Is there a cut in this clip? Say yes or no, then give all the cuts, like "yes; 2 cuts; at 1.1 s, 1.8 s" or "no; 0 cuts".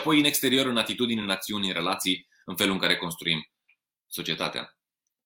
no; 0 cuts